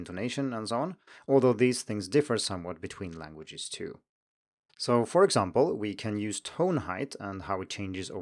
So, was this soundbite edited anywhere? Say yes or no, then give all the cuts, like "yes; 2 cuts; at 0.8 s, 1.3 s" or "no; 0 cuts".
yes; 1 cut; at 4.7 s